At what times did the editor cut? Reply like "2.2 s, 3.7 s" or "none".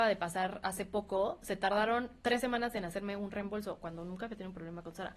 none